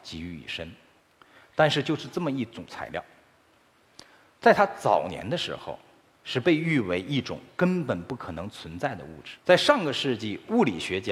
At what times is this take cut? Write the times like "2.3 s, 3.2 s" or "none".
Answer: 9.4 s